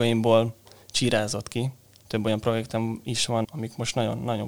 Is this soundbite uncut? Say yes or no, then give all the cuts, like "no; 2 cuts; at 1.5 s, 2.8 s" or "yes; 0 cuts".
no; 2 cuts; at 2.0 s, 3.4 s